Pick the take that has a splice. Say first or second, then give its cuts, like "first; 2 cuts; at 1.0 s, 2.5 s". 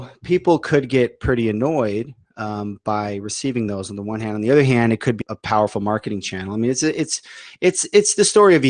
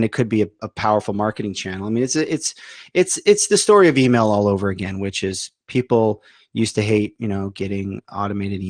first; 1 cut; at 5.2 s